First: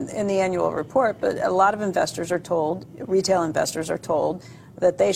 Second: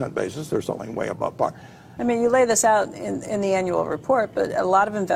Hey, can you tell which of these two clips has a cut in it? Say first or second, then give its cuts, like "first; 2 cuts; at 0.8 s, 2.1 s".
second; 1 cut; at 2.0 s